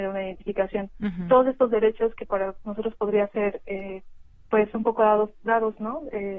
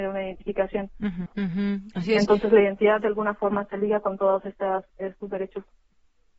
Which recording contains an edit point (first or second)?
second